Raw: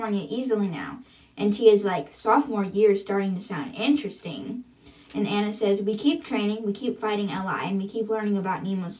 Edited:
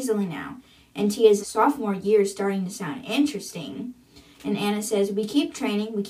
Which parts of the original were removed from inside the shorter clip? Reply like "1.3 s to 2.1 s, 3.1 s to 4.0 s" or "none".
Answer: 1.8 s to 2.1 s